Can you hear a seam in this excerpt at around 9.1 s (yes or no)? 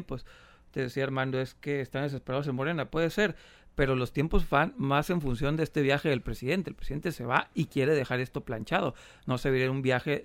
no